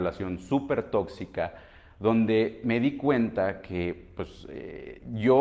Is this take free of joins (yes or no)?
yes